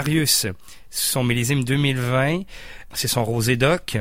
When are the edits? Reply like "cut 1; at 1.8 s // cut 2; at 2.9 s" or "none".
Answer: cut 1; at 2.9 s